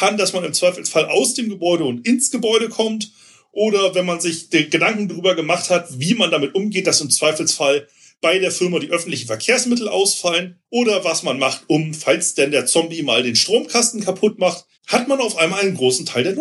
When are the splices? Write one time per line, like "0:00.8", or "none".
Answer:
0:10.6
0:14.7